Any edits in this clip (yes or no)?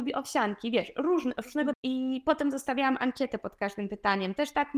yes